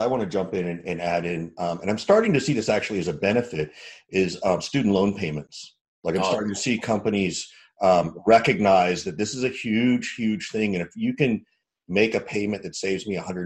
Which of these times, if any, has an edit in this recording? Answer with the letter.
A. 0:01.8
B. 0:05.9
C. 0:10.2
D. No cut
D